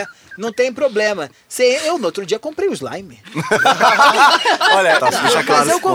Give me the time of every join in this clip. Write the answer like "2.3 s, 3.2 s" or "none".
5.0 s